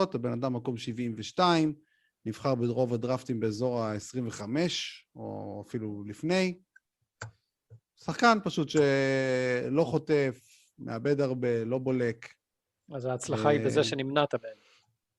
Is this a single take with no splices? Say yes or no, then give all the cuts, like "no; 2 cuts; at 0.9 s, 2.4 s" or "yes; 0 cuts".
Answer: yes; 0 cuts